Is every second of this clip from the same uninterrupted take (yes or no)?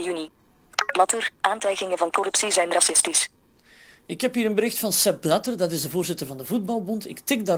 yes